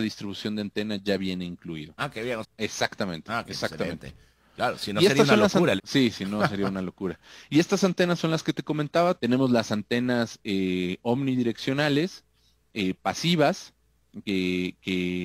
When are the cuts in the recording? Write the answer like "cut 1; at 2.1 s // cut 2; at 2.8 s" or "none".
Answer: cut 1; at 2.4 s // cut 2; at 5.8 s // cut 3; at 9.2 s